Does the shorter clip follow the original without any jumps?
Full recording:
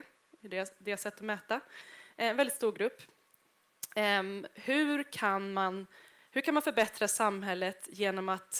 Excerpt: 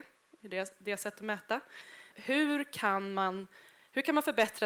no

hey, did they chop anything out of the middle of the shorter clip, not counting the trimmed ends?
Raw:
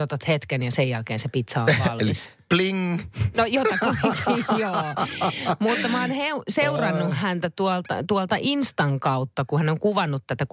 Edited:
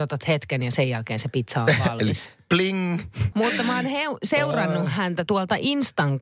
yes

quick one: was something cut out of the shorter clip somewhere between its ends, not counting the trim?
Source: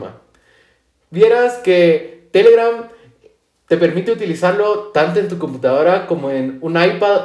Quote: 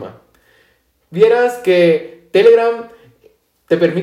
no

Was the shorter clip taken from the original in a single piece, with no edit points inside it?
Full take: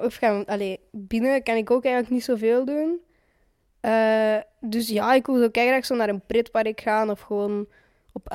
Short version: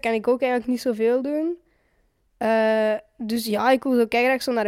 yes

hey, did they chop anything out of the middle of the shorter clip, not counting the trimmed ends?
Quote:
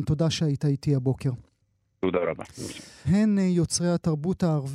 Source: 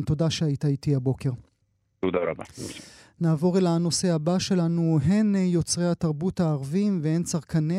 yes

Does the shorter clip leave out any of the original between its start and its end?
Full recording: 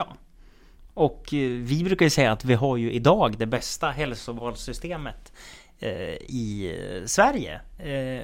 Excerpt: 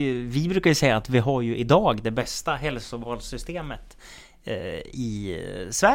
no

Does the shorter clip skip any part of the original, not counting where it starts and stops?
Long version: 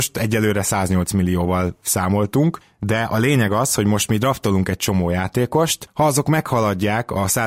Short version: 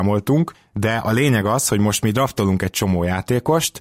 no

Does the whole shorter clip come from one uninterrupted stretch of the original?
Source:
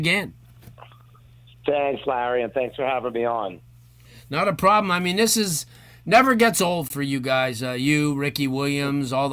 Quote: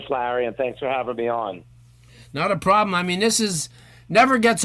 yes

